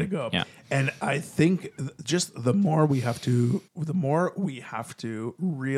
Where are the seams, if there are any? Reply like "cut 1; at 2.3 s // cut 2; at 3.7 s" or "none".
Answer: cut 1; at 3.7 s